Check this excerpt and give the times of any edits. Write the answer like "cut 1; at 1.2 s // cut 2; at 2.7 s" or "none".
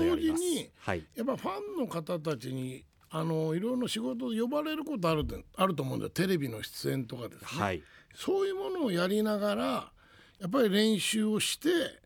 none